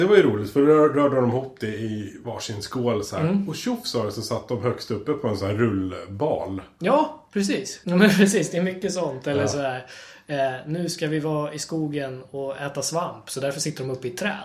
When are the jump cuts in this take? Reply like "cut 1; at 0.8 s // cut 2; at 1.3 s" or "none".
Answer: cut 1; at 7.8 s